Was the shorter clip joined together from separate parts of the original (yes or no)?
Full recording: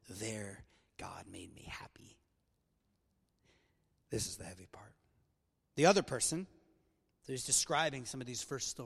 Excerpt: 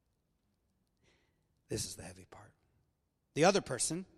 no